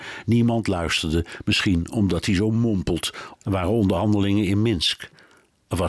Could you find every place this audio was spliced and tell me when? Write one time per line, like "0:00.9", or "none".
0:03.3